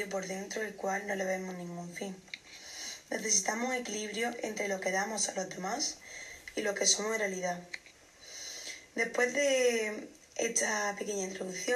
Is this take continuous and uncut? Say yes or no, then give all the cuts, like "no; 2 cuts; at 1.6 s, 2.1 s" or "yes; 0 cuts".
yes; 0 cuts